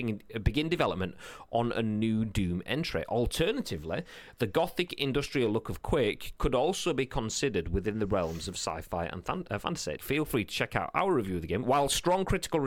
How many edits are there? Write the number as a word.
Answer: two